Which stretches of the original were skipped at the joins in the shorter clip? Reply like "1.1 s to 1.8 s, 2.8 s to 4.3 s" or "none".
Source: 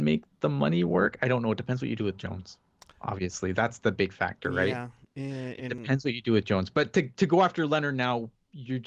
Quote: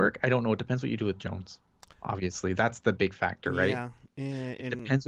none